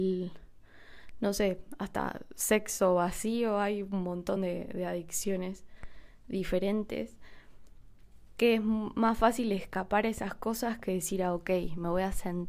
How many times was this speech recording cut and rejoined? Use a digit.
0